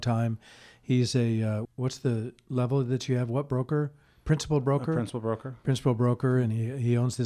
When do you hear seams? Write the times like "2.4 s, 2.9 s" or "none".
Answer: 1.6 s